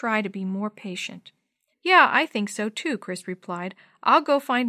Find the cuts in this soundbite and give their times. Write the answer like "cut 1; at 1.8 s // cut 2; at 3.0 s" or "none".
cut 1; at 1.7 s